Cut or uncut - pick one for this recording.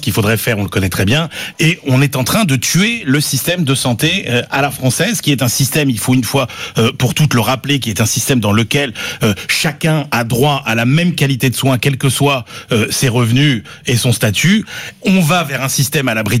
cut